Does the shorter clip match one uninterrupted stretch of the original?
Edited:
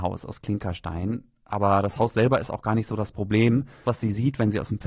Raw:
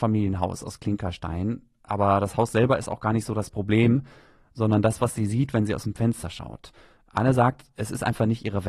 no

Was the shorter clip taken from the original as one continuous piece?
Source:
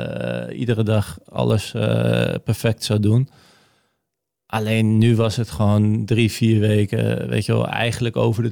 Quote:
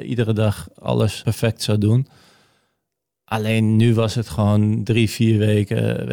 no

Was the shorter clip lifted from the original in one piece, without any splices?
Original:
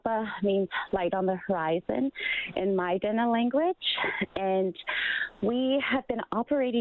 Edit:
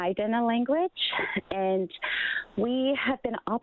yes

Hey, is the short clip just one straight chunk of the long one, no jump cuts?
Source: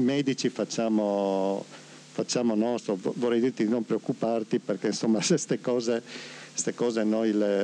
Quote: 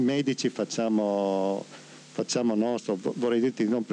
yes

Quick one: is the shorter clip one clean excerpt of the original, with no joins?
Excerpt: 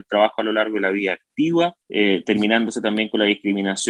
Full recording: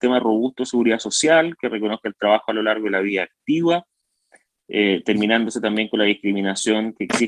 no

